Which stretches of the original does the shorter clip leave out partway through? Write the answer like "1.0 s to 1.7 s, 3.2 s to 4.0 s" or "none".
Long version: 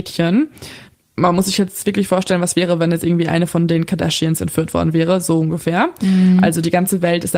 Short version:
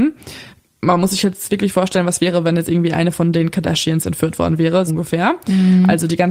5.2 s to 5.4 s